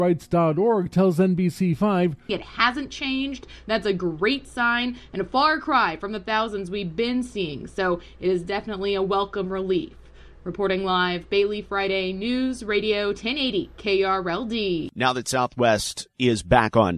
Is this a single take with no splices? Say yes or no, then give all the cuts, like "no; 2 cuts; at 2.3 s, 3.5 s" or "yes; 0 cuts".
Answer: no; 1 cut; at 2.3 s